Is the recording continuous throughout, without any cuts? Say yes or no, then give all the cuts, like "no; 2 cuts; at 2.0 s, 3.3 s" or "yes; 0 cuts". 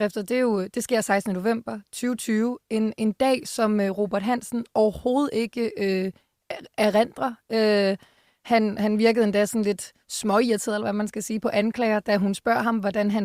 yes; 0 cuts